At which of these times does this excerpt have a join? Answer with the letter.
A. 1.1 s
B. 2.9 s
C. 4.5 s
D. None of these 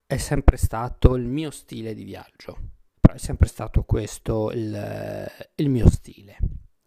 B